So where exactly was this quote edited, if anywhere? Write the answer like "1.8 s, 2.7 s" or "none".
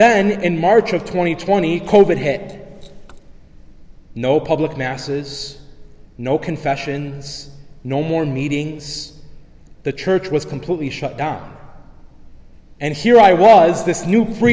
4.1 s, 9.8 s